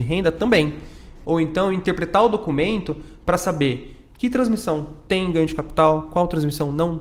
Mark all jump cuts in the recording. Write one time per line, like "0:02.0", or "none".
0:01.2